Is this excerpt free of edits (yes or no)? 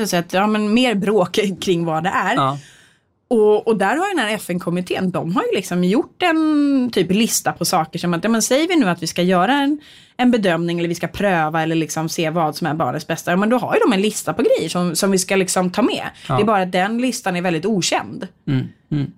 yes